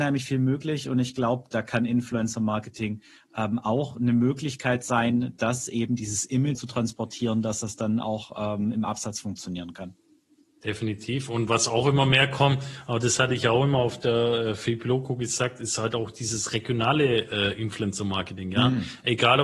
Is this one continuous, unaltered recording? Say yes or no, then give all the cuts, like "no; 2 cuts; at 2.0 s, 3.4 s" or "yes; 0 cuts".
no; 1 cut; at 6.6 s